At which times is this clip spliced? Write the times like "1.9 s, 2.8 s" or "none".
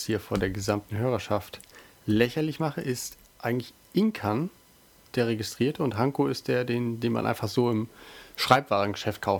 none